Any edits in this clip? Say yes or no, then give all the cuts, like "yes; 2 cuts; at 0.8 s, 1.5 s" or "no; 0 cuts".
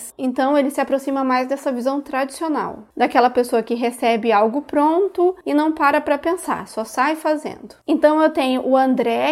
yes; 1 cut; at 7.8 s